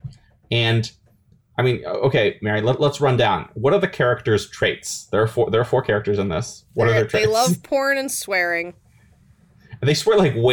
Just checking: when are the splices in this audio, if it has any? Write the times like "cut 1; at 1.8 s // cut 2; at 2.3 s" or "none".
none

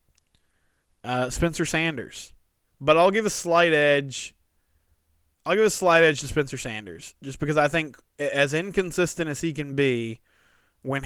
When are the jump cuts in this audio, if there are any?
cut 1; at 2.7 s

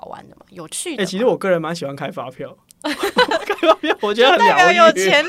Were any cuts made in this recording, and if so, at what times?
none

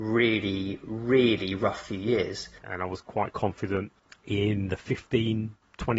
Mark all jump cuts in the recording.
cut 1; at 2.6 s

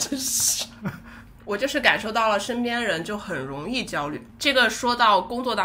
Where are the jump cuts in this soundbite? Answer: none

